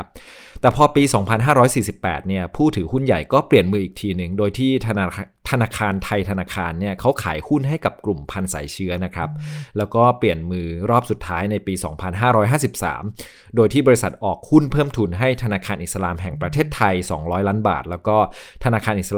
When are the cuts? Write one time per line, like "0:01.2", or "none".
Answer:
none